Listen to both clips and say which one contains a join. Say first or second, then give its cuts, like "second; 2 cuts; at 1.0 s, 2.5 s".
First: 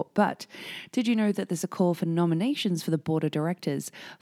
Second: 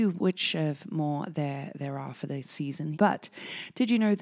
second; 1 cut; at 2.9 s